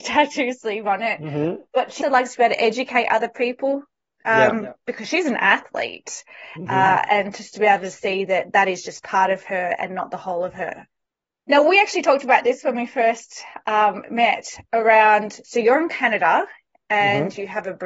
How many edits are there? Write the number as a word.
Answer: one